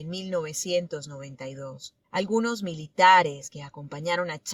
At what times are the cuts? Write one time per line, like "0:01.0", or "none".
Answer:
0:02.0